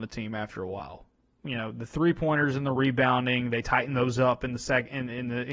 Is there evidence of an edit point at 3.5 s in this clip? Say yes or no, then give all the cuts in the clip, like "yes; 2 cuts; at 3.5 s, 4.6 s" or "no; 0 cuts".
no; 1 cut; at 1.4 s